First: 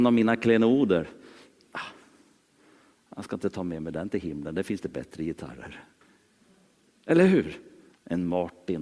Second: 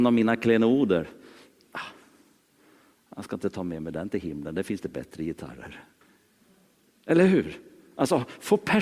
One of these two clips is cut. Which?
first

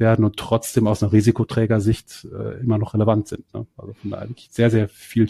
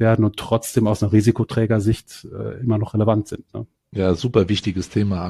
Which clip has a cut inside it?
second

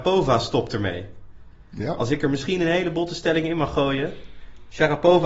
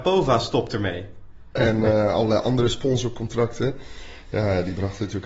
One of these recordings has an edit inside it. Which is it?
second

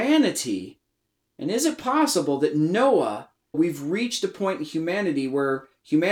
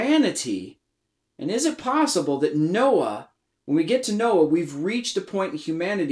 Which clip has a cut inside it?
first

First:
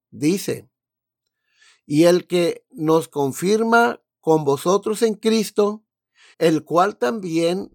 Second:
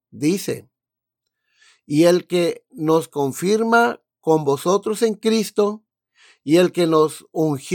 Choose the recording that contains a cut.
first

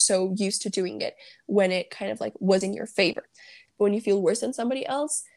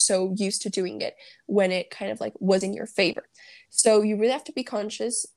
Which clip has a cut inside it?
first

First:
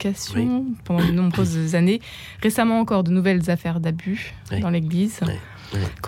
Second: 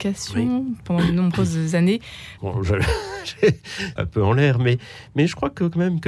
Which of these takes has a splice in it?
second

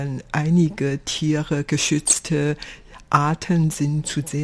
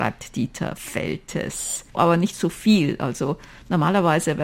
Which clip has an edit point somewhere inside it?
second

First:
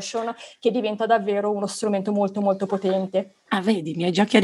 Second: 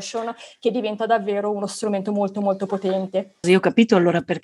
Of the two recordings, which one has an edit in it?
second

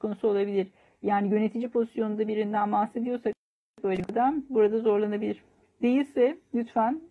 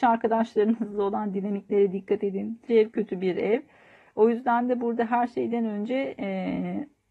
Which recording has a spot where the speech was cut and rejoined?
second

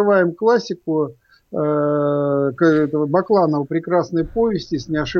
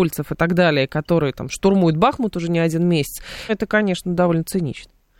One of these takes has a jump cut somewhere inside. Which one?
second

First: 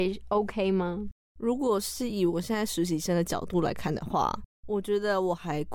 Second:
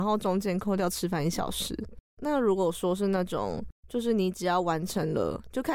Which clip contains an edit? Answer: second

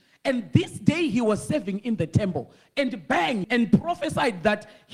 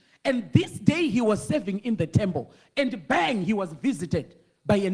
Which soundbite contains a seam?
first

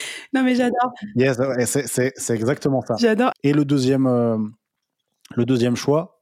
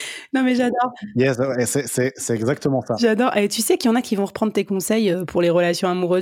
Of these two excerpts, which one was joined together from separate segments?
first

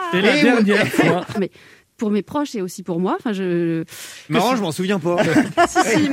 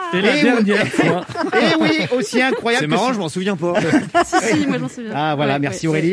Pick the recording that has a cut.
first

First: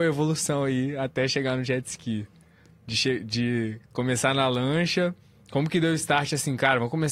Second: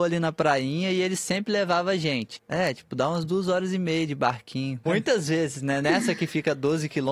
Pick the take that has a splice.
second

